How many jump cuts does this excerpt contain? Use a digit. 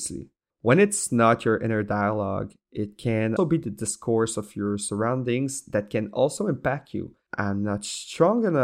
2